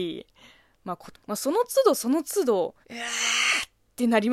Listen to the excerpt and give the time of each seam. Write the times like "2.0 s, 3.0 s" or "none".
1.1 s, 2.8 s